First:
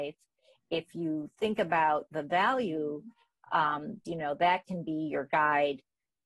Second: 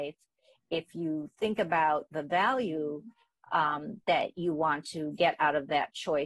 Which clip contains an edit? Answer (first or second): first